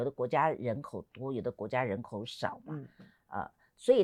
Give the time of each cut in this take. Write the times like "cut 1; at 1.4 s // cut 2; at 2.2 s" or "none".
none